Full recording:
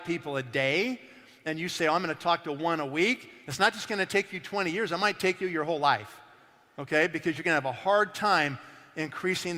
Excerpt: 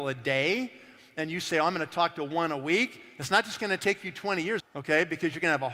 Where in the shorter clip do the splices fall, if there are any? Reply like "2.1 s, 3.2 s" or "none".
4.6 s